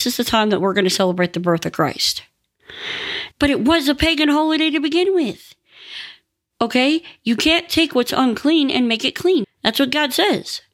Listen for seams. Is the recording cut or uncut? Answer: cut